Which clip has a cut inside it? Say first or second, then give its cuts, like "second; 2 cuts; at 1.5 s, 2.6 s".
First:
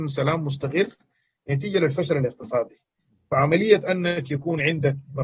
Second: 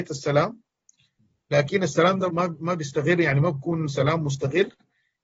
second; 1 cut; at 2.3 s